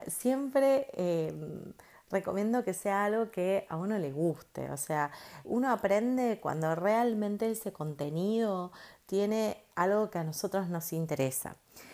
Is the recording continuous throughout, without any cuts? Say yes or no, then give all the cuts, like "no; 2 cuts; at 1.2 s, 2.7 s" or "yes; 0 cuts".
no; 1 cut; at 5.4 s